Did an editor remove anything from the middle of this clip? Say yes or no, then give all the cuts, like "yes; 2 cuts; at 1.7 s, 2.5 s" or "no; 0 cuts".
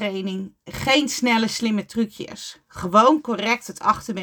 no; 0 cuts